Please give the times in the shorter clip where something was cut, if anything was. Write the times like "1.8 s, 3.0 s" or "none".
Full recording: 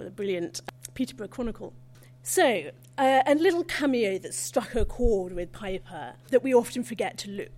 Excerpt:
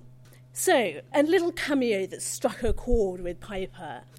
1.1 s